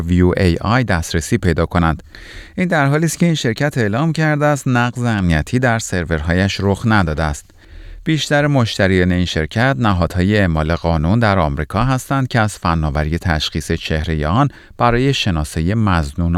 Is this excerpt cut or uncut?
uncut